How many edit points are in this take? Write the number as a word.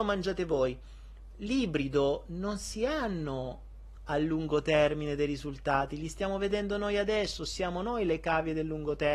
zero